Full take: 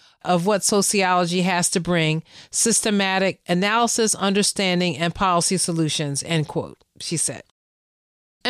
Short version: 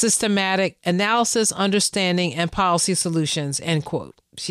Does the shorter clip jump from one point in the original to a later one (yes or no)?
no